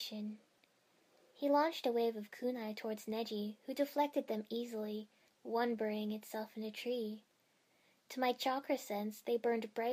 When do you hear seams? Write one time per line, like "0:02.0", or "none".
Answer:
0:05.3